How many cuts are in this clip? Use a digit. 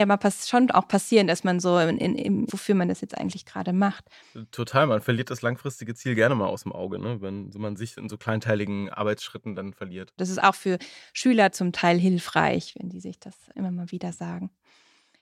2